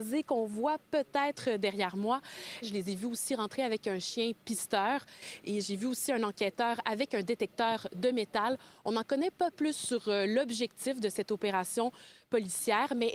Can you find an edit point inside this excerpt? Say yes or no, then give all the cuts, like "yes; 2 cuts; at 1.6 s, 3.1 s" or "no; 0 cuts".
yes; 1 cut; at 2.6 s